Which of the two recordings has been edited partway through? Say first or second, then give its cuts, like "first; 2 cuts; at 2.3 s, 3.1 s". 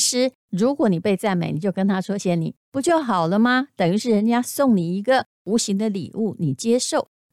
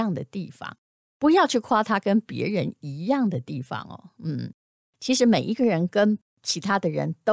first; 1 cut; at 2.2 s